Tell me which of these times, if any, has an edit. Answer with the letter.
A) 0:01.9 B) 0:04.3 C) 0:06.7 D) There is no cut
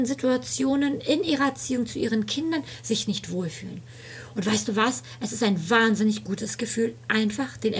B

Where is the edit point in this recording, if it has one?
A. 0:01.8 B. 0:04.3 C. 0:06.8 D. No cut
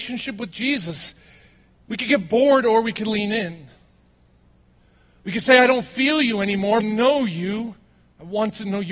C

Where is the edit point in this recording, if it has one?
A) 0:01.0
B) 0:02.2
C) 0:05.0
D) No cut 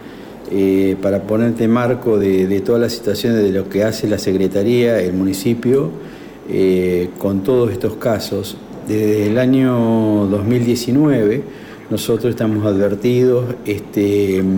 D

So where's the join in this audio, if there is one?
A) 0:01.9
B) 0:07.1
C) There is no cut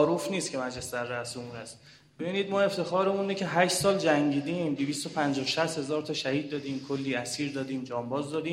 C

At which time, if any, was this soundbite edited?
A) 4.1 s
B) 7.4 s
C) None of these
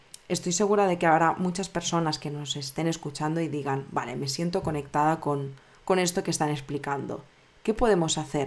C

